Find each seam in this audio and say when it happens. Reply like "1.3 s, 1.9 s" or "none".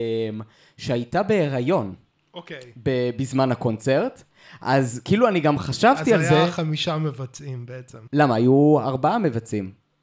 8.1 s